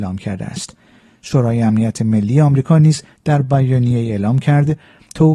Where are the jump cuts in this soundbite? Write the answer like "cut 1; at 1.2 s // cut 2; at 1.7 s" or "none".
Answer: none